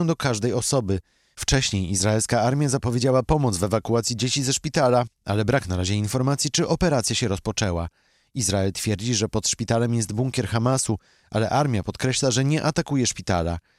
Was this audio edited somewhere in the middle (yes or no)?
no